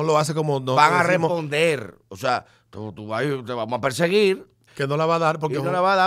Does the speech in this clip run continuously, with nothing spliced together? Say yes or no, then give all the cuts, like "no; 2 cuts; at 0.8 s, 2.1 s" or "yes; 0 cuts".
no; 1 cut; at 4.7 s